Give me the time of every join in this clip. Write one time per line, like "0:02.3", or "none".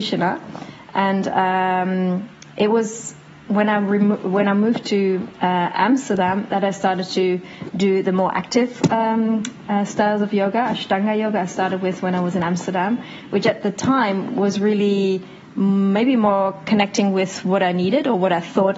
none